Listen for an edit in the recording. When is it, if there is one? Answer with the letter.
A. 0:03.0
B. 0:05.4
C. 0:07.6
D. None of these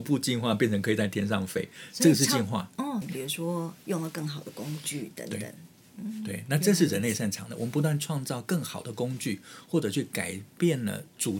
A